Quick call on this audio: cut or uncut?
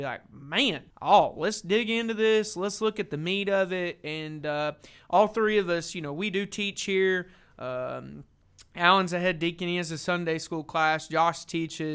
cut